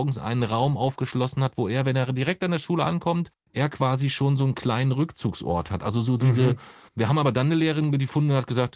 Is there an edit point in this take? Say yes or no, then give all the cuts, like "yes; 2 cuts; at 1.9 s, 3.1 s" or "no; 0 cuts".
yes; 1 cut; at 6.9 s